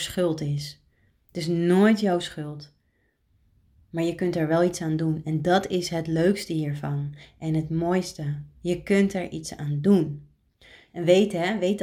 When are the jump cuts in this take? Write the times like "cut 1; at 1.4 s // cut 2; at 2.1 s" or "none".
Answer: cut 1; at 8.5 s // cut 2; at 10.9 s